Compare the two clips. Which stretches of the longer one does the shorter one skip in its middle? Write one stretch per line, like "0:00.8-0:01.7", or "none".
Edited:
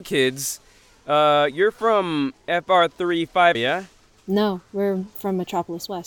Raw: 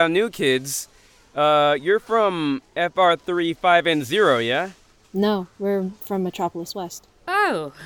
0:03.8-0:04.4